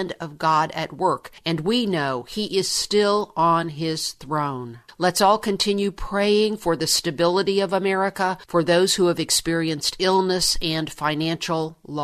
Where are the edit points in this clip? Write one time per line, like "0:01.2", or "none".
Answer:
none